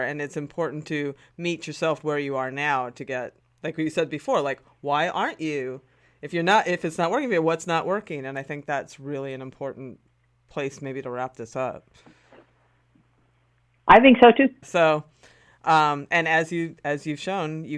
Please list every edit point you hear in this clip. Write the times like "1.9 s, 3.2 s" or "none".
14.6 s